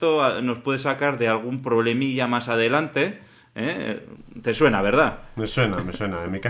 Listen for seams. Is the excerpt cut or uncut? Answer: uncut